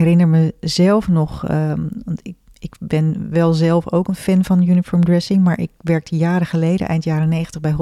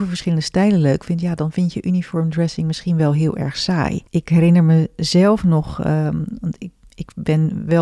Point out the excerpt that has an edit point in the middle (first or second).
second